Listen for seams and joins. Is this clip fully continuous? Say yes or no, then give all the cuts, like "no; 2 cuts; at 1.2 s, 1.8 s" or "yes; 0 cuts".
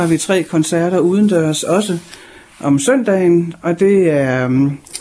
yes; 0 cuts